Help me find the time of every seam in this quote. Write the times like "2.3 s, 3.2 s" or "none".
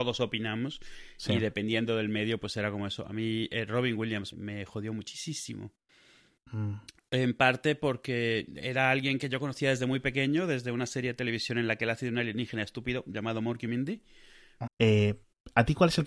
4.3 s, 14.7 s